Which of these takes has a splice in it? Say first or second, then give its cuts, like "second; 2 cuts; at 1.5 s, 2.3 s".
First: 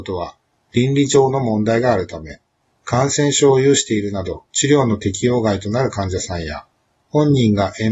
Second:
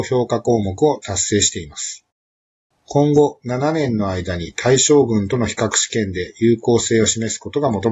second; 1 cut; at 2.7 s